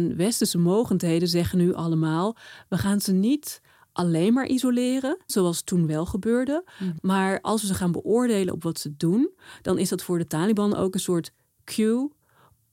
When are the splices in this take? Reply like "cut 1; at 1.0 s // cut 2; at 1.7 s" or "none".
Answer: cut 1; at 5.3 s // cut 2; at 7.0 s

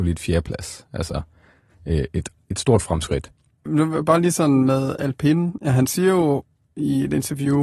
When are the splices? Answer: cut 1; at 3.7 s

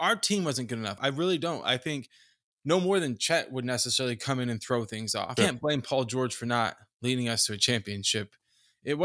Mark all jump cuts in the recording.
cut 1; at 1.0 s // cut 2; at 5.4 s

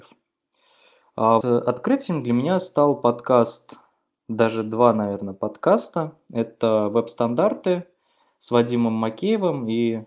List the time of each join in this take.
cut 1; at 1.4 s

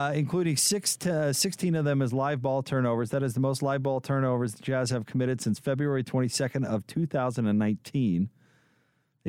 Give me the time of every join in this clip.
none

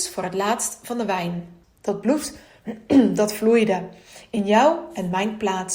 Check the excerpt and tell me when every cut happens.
cut 1; at 1.6 s

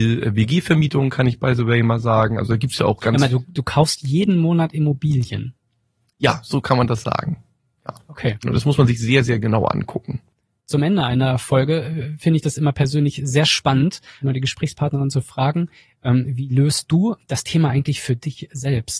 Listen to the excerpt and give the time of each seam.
cut 1; at 8.4 s // cut 2; at 14.2 s

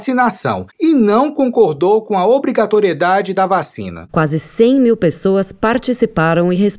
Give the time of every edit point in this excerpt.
cut 1; at 4.1 s

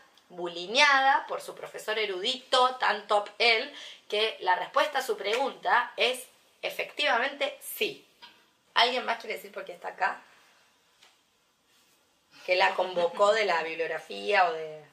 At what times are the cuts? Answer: cut 1; at 8.7 s

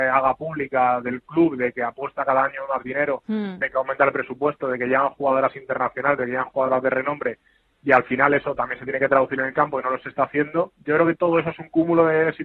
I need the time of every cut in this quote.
none

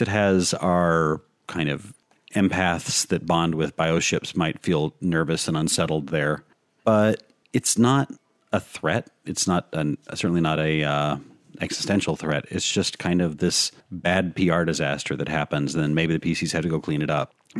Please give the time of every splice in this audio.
none

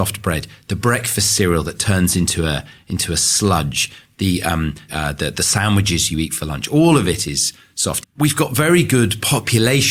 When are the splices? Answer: cut 1; at 4.9 s // cut 2; at 8.0 s

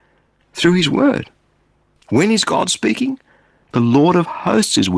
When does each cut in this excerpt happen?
cut 1; at 3.6 s

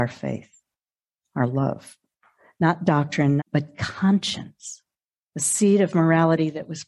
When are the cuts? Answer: cut 1; at 3.4 s

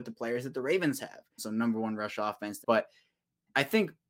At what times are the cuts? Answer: cut 1; at 1.4 s // cut 2; at 2.6 s

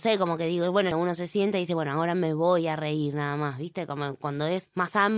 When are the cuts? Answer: cut 1; at 0.9 s

